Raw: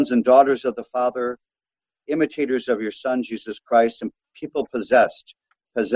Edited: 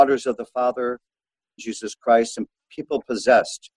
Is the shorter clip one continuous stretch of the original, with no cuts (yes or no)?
no